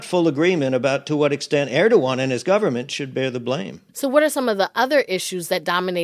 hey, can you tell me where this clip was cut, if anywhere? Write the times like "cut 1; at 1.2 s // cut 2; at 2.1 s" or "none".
cut 1; at 3.9 s